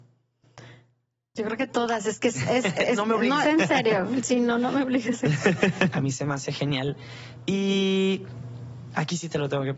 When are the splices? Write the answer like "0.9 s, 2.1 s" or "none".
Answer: 3.4 s, 5.9 s